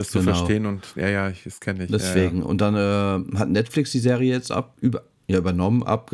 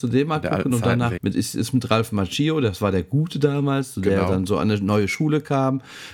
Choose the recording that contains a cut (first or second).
second